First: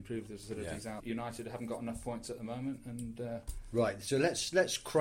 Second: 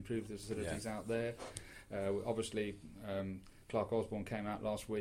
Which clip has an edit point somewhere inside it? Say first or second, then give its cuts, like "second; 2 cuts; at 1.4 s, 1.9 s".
first; 1 cut; at 1.0 s